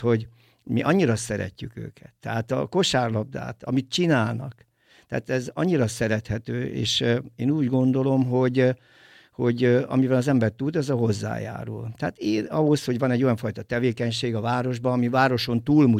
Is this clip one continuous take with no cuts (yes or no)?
yes